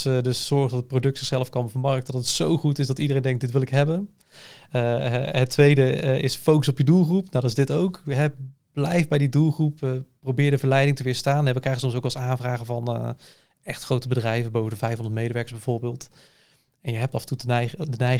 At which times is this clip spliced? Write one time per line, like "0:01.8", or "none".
none